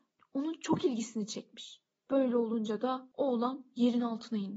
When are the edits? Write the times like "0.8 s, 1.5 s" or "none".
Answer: none